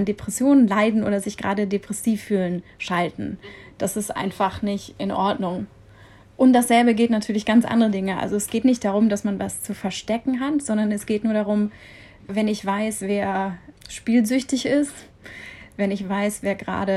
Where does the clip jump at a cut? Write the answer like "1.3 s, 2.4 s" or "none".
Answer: none